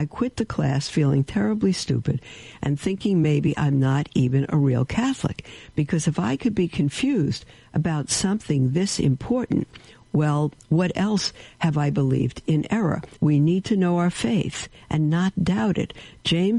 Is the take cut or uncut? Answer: cut